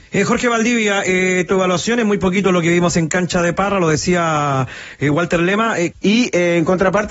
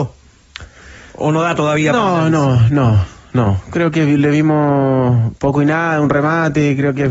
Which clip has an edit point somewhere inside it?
first; 1 cut; at 5.9 s

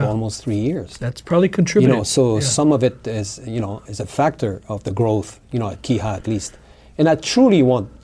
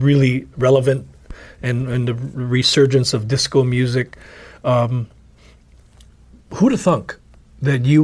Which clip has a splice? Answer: first; 1 cut; at 3.9 s

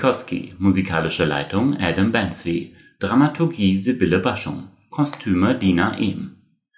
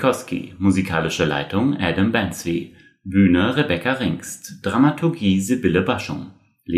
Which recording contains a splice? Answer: first; 2 cuts; at 3.0 s, 4.9 s

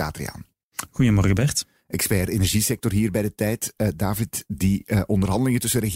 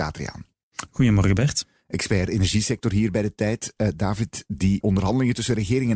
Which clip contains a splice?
second; 1 cut; at 4.8 s

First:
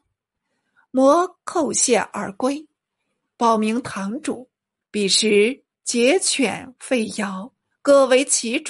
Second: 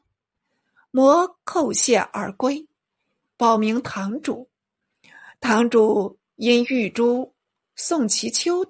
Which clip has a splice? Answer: first; 1 cut; at 4.8 s

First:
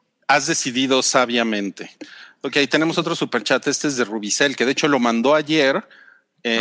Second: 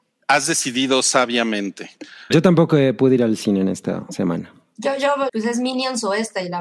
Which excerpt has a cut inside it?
second; 2 cuts; at 2.3 s, 5.3 s

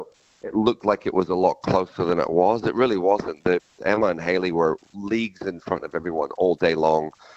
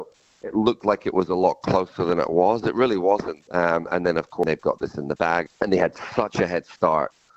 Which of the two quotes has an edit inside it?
second; 2 cuts; at 3.4 s, 5.5 s

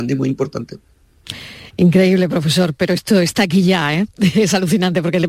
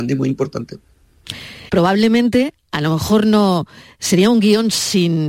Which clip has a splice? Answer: second; 1 cut; at 1.7 s

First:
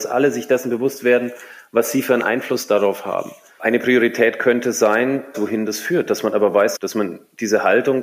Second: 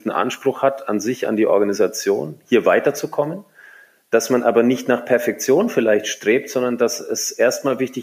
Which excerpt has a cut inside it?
first; 3 cuts; at 3.6 s, 5.3 s, 6.8 s

